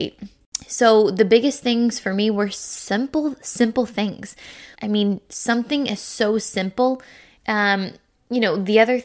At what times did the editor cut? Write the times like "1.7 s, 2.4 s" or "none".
4.7 s, 7.4 s